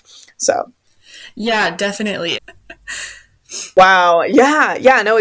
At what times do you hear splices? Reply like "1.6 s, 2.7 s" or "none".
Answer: 2.3 s